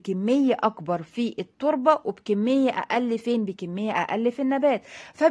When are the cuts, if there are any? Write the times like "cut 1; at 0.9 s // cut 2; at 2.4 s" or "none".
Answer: none